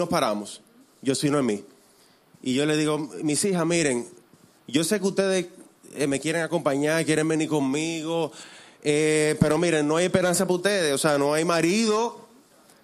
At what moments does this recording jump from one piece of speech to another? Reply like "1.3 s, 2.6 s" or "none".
none